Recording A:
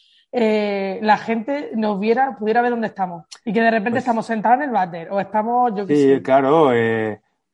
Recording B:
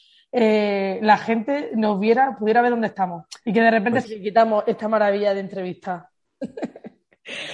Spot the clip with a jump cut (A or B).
B